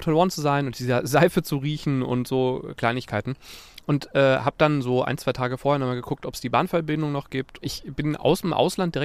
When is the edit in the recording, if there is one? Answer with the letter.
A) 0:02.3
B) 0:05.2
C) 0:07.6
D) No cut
C